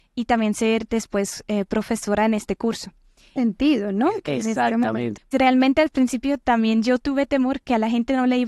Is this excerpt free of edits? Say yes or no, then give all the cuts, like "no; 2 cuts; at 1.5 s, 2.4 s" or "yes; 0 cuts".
no; 2 cuts; at 3.4 s, 5.3 s